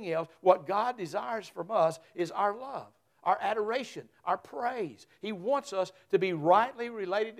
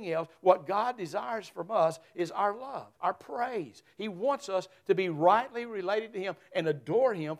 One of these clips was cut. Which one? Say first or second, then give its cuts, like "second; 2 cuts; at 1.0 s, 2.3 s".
second; 1 cut; at 3.0 s